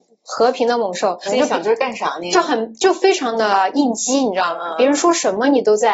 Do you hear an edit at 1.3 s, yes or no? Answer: yes